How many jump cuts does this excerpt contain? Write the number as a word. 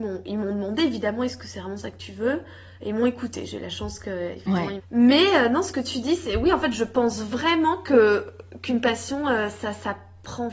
one